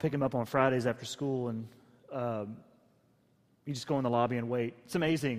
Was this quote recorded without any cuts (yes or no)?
yes